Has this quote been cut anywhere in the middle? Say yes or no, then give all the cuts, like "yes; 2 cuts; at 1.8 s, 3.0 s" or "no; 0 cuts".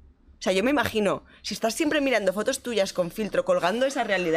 no; 0 cuts